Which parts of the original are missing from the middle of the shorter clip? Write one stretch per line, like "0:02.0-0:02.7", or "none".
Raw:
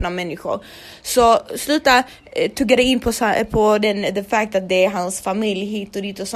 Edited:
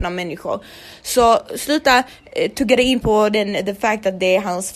0:03.0-0:03.5